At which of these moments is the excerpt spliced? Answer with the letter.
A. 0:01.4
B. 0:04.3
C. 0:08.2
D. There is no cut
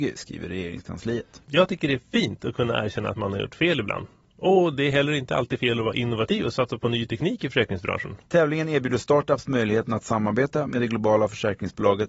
C